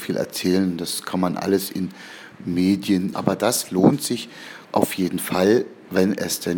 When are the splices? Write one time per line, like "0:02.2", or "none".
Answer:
0:03.1
0:04.6